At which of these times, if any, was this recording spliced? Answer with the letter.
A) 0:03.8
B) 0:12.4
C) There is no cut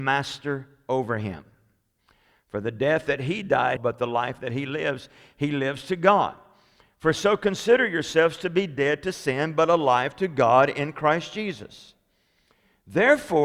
A